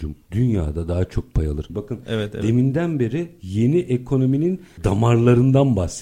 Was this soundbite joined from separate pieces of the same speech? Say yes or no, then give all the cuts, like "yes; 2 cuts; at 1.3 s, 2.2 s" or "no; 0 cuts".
yes; 1 cut; at 1.7 s